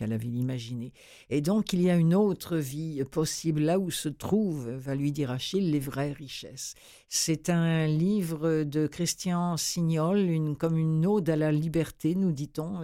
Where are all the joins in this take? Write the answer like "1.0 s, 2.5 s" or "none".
none